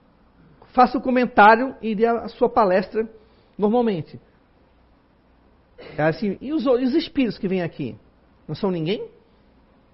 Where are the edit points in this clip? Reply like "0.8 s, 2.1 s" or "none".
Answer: 6.4 s